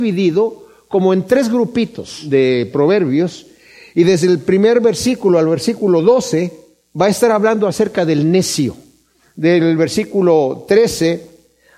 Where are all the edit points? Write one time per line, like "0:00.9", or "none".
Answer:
none